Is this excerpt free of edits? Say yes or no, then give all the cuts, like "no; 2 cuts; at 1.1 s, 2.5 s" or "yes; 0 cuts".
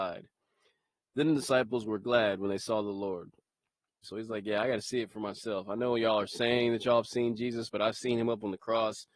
no; 1 cut; at 4.0 s